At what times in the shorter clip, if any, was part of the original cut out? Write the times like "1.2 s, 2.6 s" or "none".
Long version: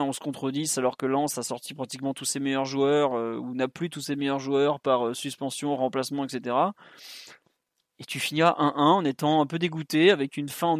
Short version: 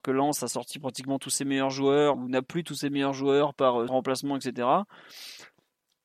2.1 s, 3.9 s